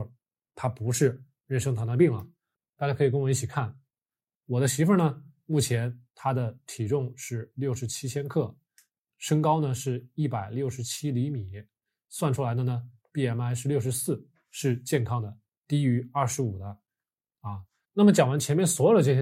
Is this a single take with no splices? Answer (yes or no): no